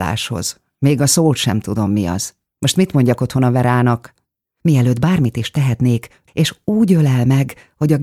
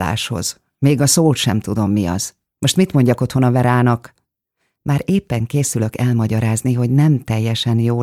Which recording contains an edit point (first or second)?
first